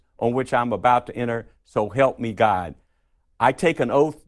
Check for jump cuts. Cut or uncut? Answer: uncut